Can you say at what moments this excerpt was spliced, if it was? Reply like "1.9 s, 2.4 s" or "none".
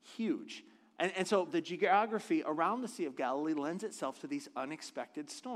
1.5 s